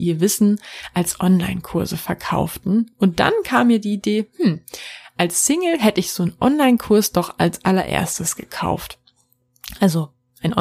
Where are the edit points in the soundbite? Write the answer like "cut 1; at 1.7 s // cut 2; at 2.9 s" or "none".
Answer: none